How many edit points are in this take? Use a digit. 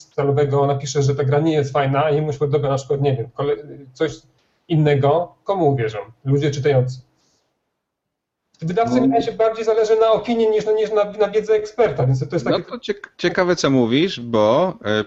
0